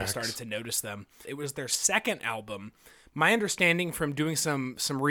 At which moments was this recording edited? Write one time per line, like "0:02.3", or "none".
0:01.2